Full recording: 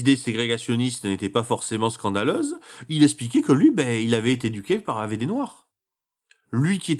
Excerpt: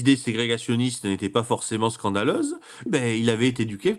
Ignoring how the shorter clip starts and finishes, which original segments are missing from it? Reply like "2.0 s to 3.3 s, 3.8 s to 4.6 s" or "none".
2.9 s to 3.7 s